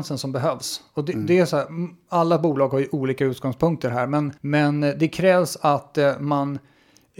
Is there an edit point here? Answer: yes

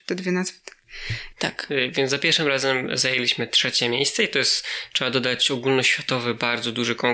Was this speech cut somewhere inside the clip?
yes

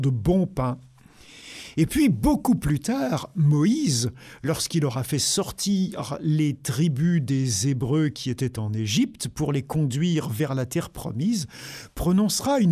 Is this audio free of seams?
yes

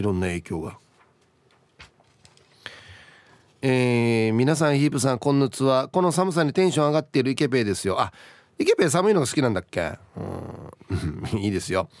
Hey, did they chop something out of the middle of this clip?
yes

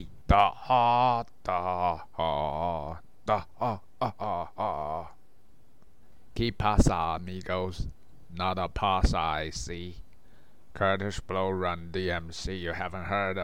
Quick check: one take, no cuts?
no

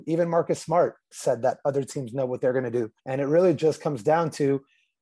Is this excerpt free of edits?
no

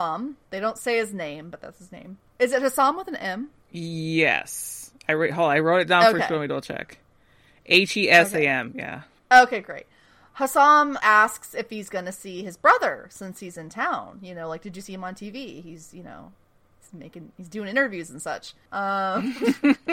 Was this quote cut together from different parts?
yes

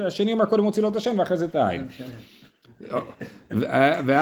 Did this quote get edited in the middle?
no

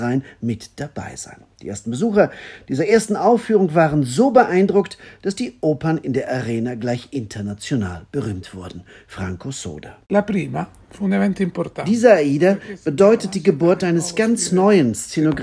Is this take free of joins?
no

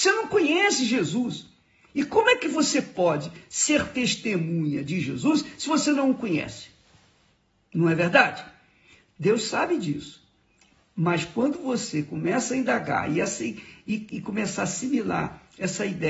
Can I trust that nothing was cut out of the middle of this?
yes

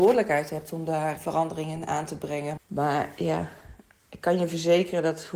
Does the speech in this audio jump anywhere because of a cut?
yes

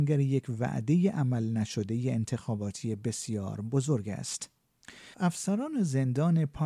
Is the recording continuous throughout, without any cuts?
no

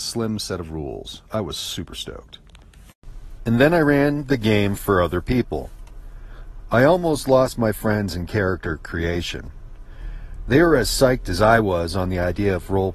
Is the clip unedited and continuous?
yes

